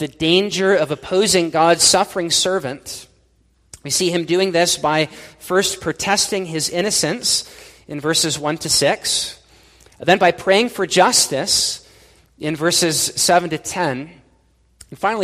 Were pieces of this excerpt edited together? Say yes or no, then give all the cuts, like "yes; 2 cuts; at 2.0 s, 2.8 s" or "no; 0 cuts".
no; 0 cuts